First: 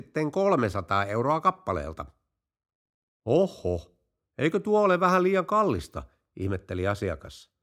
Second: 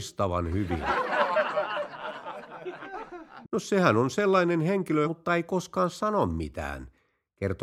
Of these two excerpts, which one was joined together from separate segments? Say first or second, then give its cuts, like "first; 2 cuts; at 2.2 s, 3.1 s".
second; 2 cuts; at 3.4 s, 5.0 s